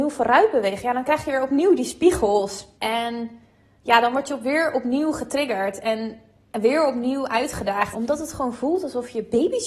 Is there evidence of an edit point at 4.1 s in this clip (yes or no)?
no